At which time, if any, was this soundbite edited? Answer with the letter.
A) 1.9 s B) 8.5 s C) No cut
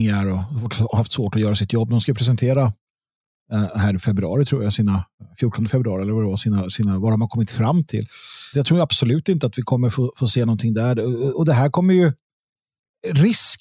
B